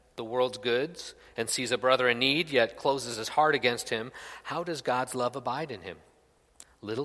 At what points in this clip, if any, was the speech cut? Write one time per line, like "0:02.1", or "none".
none